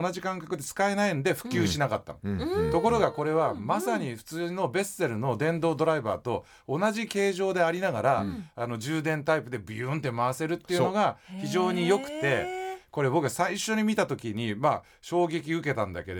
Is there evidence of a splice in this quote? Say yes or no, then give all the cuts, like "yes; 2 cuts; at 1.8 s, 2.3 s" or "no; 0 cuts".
no; 0 cuts